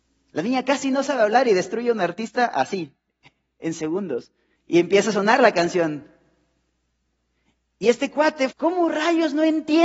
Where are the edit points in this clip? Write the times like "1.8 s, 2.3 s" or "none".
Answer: 4.6 s, 8.5 s